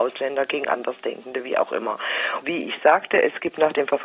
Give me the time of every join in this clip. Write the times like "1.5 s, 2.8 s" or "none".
2.4 s

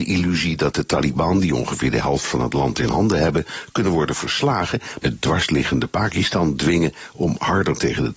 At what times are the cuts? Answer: 5.0 s

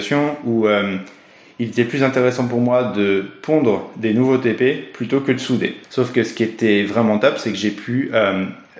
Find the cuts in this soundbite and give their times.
5.8 s

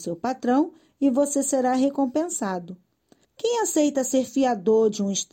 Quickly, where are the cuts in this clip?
3.2 s

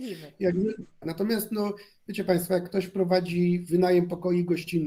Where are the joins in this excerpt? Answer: 1.0 s

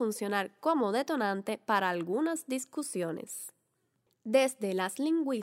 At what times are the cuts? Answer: 4.1 s

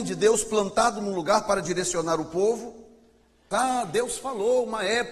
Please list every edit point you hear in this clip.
3.5 s

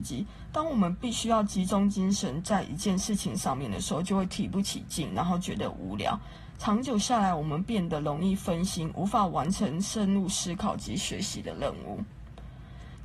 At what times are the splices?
none

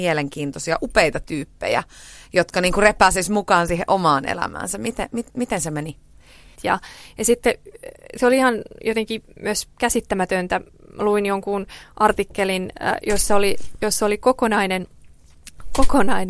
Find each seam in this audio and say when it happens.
6.6 s

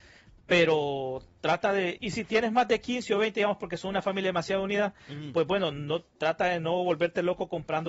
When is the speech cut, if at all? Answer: 2.0 s

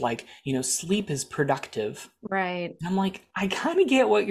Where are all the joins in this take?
none

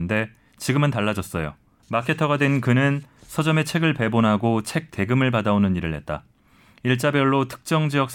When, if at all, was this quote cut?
1.8 s

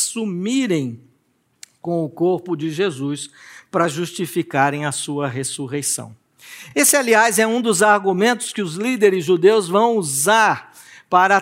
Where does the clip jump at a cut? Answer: none

